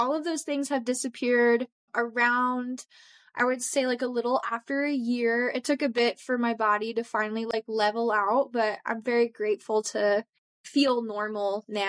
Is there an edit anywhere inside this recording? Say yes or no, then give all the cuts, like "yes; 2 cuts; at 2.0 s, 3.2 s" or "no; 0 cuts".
no; 0 cuts